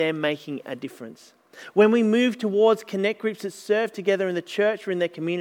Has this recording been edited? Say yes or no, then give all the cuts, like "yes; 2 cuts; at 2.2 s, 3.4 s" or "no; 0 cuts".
no; 0 cuts